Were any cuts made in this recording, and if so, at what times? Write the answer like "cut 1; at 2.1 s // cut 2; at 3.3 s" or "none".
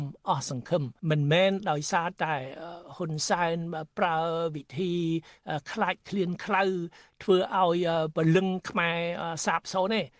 cut 1; at 1.0 s

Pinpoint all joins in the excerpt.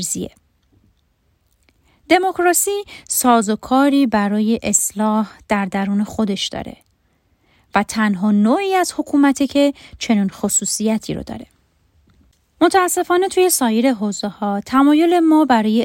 none

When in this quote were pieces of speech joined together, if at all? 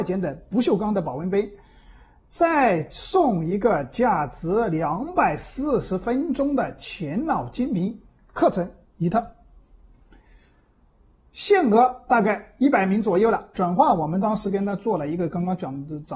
cut 1; at 13.5 s

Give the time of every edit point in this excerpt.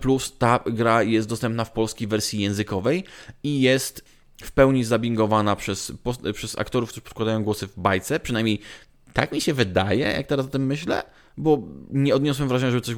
none

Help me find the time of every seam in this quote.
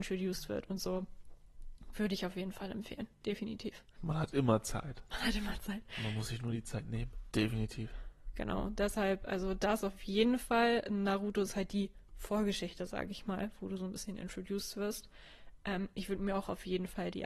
cut 1; at 4.0 s // cut 2; at 7.3 s

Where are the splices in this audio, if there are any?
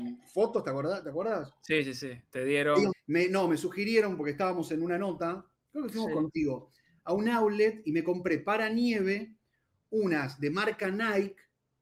cut 1; at 2.9 s

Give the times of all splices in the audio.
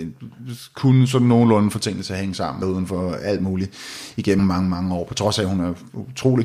cut 1; at 2.6 s // cut 2; at 4.4 s

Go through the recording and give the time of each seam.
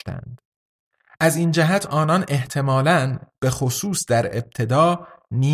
none

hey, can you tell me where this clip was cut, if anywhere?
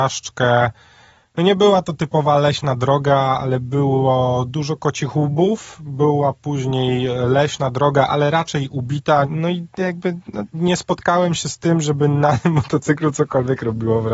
cut 1; at 9.2 s // cut 2; at 10.5 s

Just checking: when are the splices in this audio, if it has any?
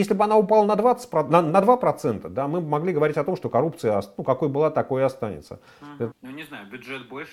cut 1; at 6.1 s

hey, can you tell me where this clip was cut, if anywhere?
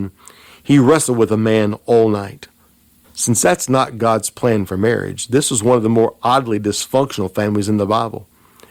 cut 1; at 3.0 s

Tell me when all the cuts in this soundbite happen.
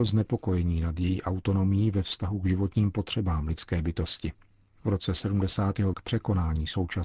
cut 1; at 5.9 s

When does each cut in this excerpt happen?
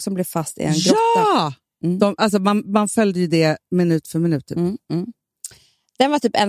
none

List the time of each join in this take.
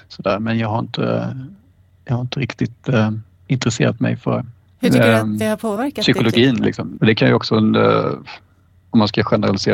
cut 1; at 7.0 s

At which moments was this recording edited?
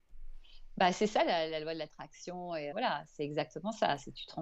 cut 1; at 2.7 s

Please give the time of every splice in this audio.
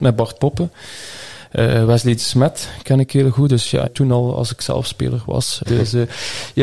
cut 1; at 3.8 s // cut 2; at 5.7 s

